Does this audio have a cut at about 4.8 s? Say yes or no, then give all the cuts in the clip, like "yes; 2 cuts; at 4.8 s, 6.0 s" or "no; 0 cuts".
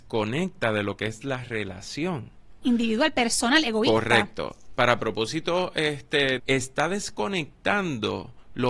no; 2 cuts; at 2.6 s, 6.4 s